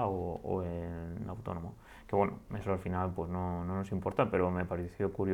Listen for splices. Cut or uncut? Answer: uncut